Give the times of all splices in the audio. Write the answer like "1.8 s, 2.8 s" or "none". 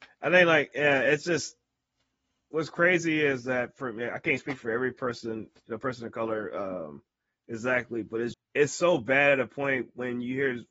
8.3 s